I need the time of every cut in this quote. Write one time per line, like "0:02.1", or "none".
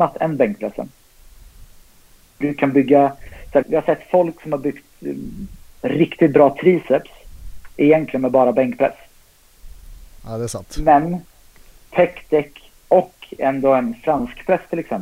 0:03.6
0:10.1